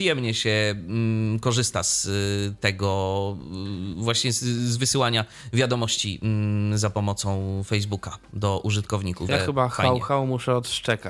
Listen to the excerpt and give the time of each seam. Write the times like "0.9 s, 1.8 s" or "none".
9.3 s